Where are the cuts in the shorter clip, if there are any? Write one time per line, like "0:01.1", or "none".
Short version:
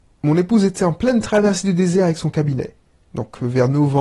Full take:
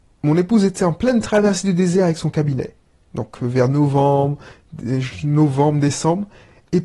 none